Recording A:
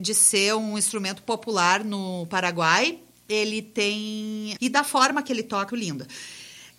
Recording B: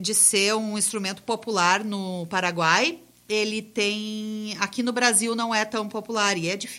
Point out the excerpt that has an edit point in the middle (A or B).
A